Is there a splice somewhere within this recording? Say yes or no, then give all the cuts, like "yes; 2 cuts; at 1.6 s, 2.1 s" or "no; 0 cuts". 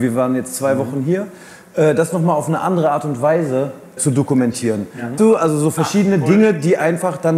yes; 2 cuts; at 4.0 s, 5.2 s